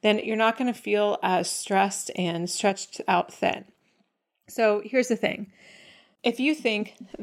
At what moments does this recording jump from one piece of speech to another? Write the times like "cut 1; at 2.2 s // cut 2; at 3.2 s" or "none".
none